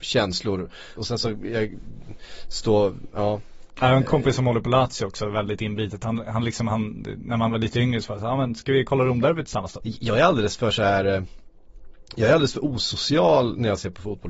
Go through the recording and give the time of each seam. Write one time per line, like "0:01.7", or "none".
0:01.0
0:09.8